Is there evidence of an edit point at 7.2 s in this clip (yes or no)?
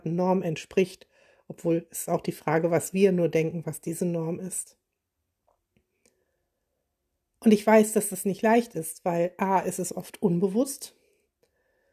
no